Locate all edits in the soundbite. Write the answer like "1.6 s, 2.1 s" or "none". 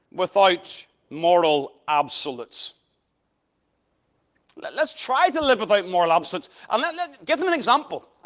none